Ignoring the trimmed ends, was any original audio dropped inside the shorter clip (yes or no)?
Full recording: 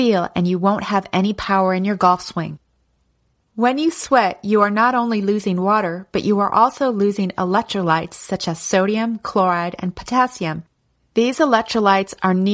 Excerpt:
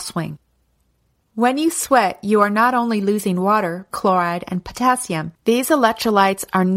yes